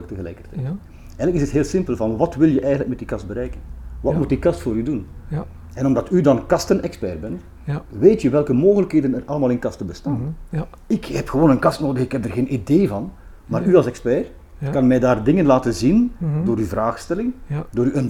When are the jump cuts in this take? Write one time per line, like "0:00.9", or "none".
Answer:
none